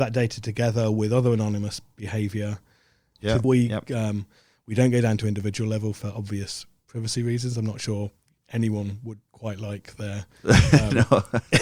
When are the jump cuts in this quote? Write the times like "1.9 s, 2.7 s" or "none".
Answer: 3.4 s